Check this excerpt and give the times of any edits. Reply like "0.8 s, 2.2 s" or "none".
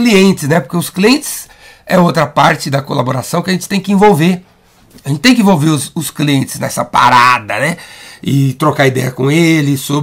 none